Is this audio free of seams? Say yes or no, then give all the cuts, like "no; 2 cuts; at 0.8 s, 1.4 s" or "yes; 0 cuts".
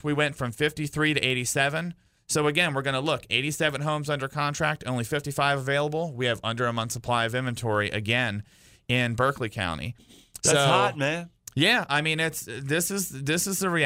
no; 1 cut; at 10.4 s